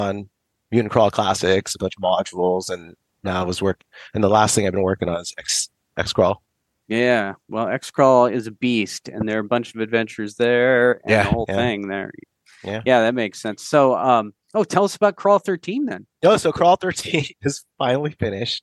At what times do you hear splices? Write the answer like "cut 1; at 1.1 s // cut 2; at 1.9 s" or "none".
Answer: none

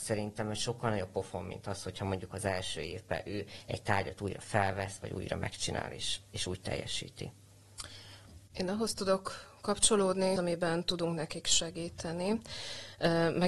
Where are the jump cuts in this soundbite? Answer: cut 1; at 8.5 s // cut 2; at 10.4 s

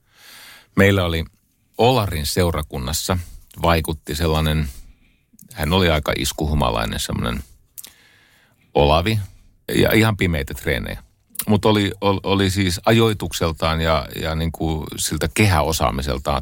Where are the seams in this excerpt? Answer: cut 1; at 9.7 s

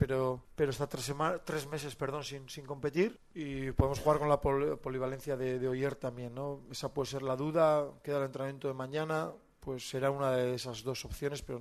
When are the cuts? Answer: none

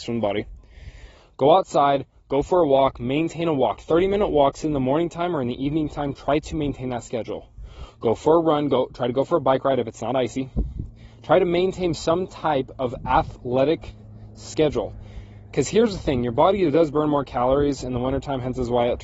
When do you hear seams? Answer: none

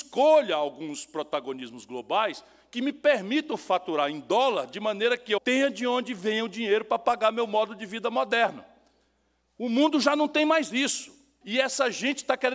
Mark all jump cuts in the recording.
cut 1; at 5.4 s // cut 2; at 11.4 s

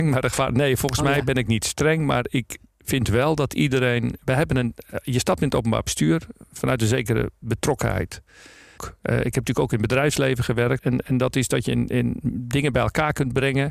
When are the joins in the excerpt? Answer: cut 1; at 8.8 s // cut 2; at 10.8 s

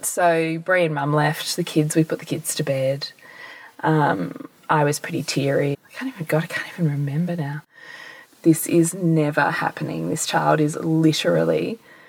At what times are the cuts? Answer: cut 1; at 5.7 s // cut 2; at 8.2 s

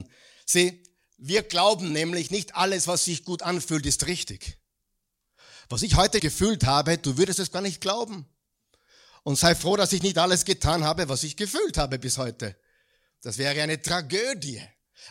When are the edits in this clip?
cut 1; at 6.2 s

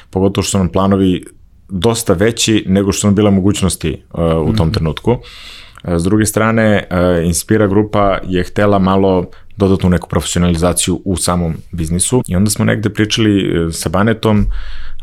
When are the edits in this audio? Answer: cut 1; at 12.2 s

